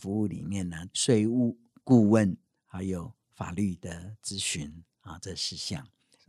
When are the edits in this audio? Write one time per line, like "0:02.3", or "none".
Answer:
0:00.9